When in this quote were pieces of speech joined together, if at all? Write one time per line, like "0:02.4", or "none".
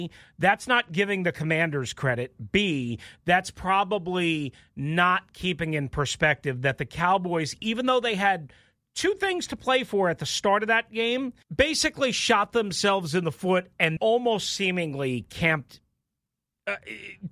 0:11.4
0:14.0